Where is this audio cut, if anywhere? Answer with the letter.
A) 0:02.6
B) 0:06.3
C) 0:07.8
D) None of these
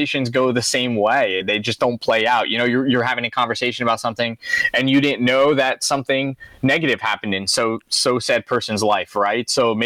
D